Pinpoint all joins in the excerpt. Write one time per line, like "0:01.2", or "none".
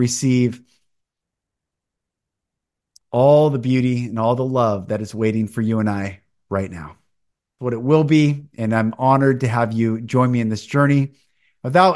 0:07.5